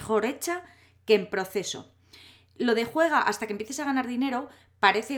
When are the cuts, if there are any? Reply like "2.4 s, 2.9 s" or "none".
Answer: none